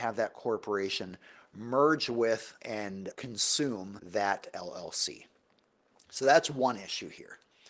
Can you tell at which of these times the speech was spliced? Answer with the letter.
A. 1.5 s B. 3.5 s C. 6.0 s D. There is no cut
D